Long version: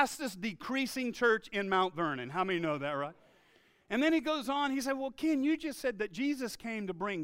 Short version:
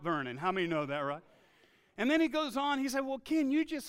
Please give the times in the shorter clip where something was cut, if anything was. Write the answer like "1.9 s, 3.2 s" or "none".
none